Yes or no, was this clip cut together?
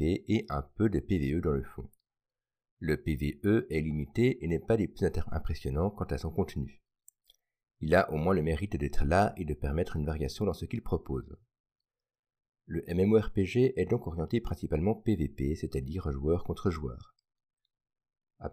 no